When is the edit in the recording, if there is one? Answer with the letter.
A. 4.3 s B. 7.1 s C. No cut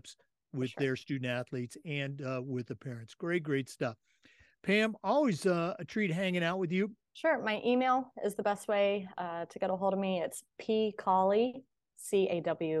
B